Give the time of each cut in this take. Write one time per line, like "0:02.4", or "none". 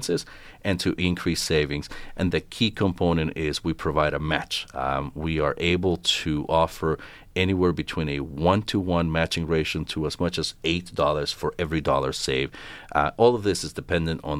0:02.3